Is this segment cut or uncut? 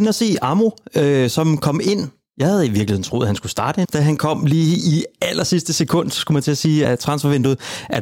cut